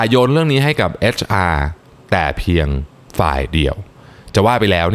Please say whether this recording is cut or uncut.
uncut